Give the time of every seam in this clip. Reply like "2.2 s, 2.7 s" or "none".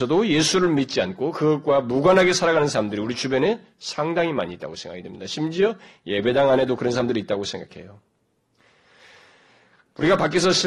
none